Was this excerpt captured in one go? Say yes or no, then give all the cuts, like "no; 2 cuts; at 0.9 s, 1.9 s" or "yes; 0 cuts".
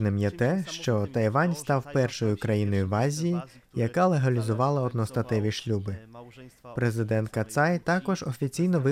yes; 0 cuts